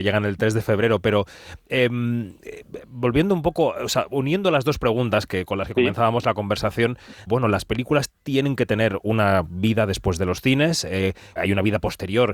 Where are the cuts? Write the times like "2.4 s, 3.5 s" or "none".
7.3 s, 11.4 s